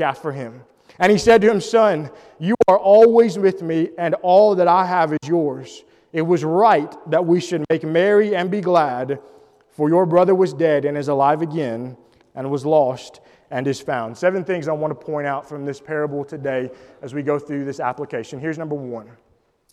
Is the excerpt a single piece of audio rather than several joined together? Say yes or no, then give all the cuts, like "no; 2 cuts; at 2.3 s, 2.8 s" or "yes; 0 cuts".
yes; 0 cuts